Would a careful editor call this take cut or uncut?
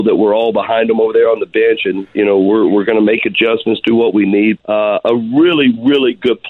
cut